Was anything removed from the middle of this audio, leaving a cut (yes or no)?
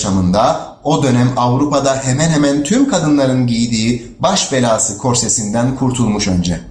no